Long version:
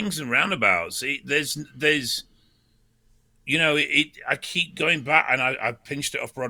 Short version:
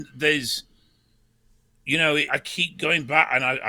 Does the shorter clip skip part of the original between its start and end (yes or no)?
yes